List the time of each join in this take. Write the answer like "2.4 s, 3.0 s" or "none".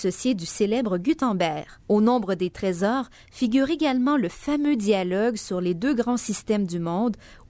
1.8 s